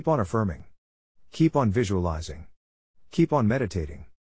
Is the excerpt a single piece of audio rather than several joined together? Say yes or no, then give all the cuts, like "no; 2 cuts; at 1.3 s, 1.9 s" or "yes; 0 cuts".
yes; 0 cuts